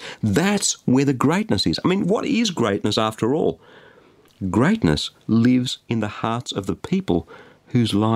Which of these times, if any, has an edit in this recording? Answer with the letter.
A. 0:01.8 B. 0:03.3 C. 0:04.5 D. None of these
D